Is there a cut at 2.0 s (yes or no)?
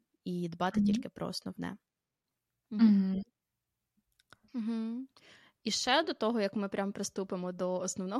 no